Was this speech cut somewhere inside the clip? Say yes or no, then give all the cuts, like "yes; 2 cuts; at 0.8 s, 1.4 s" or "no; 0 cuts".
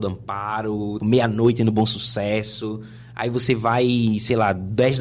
yes; 1 cut; at 1.0 s